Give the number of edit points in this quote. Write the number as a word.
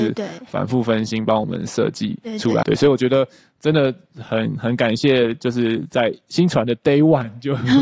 one